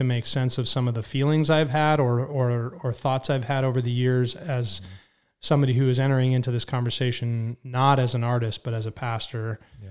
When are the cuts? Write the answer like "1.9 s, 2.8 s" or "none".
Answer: none